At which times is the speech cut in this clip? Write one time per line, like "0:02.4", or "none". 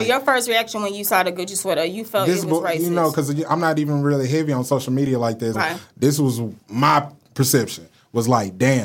0:05.5
0:06.6